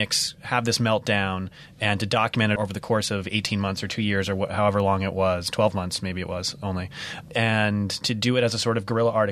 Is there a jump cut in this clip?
yes; 1 cut; at 2.6 s

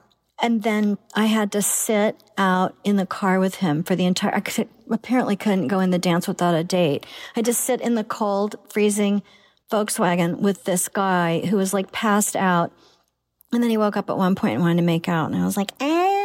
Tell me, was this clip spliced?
no; 0 cuts

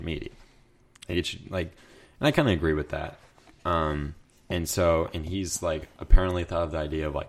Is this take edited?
no; 0 cuts

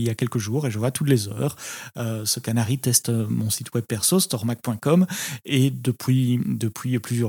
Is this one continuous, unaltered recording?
yes; 0 cuts

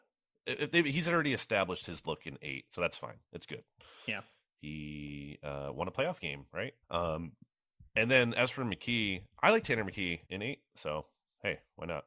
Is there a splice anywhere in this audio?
yes; 2 cuts; at 6.8 s, 10.3 s

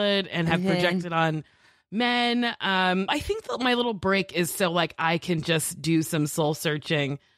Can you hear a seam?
yes; 1 cut; at 3.1 s

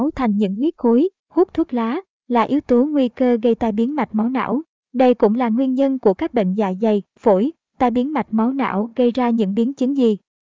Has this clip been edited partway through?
yes; 1 cut; at 1.2 s

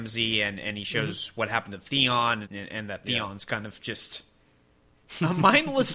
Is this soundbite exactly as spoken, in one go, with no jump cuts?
no; 1 cut; at 2.4 s

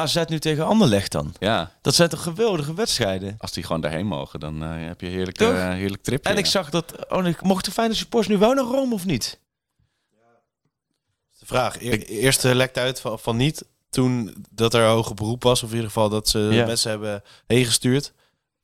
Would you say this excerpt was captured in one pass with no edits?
yes; 0 cuts

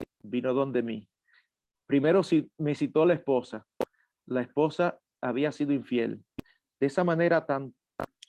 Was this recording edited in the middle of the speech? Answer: no; 0 cuts

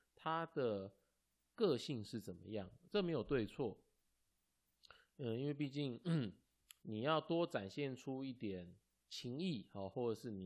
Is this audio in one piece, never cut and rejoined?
yes; 0 cuts

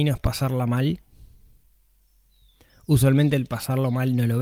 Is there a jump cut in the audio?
no; 0 cuts

